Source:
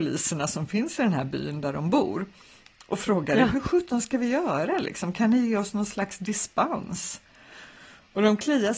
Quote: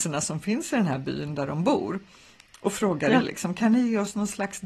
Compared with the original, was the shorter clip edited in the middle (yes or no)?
yes